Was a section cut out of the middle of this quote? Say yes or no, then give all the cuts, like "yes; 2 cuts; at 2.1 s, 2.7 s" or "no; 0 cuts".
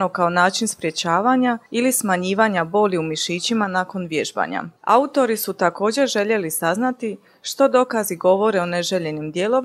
yes; 1 cut; at 4.8 s